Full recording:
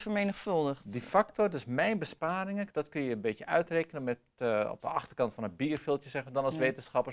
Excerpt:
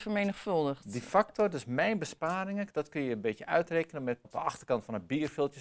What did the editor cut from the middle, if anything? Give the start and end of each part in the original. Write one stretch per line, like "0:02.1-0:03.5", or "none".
0:04.2-0:04.7